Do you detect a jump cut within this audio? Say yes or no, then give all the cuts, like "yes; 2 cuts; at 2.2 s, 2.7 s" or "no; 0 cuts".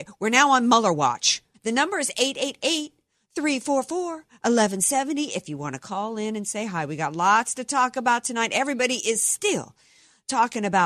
yes; 1 cut; at 1.5 s